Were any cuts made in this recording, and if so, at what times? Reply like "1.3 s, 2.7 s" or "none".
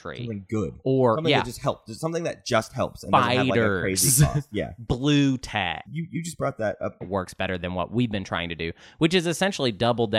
5.9 s, 7.0 s